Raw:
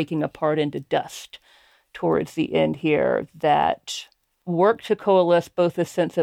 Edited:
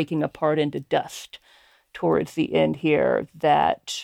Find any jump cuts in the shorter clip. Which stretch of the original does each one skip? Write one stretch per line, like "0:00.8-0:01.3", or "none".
none